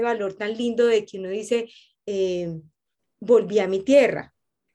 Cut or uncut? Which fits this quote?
uncut